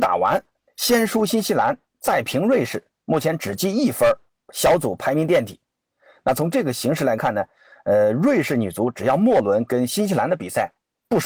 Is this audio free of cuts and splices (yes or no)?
yes